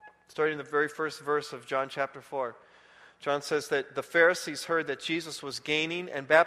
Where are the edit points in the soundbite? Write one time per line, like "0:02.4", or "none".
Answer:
none

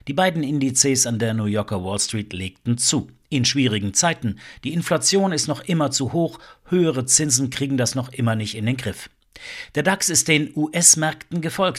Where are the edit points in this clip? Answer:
none

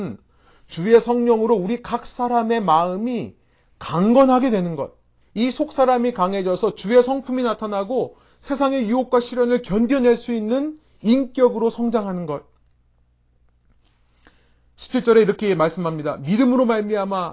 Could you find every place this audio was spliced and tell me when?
0:05.2

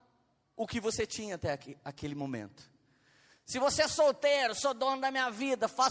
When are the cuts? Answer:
none

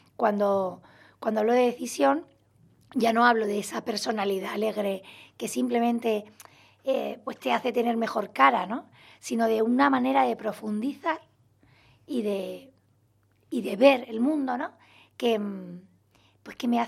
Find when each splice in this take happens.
none

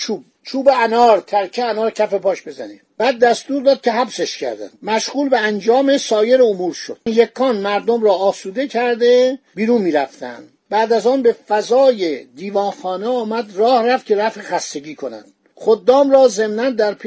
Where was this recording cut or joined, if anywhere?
0:07.1

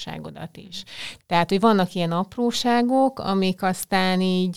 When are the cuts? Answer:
0:01.2

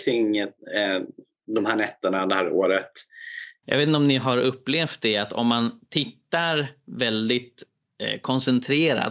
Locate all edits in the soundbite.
0:03.6

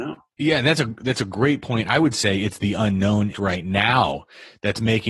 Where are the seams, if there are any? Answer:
0:03.3

